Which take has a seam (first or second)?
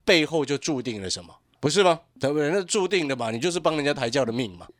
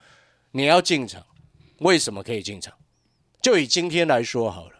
first